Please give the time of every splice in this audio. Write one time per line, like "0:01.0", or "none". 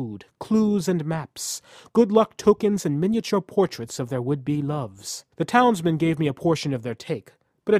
0:05.3